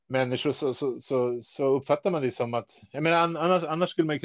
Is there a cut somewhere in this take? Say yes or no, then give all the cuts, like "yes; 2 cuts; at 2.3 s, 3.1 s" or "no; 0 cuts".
no; 0 cuts